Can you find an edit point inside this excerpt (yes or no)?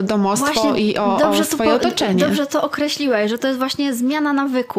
no